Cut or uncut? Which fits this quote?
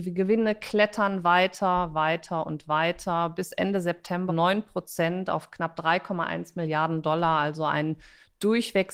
cut